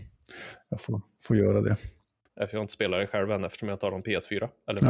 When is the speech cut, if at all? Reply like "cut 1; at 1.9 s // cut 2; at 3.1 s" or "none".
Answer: cut 1; at 2.3 s